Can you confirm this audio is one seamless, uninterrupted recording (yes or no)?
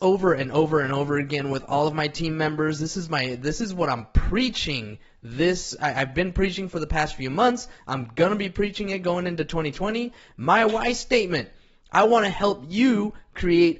no